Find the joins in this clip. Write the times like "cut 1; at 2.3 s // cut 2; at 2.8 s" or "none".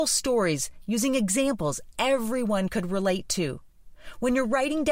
none